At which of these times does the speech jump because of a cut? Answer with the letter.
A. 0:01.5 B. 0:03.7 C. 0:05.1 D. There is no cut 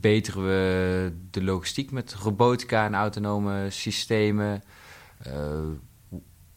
D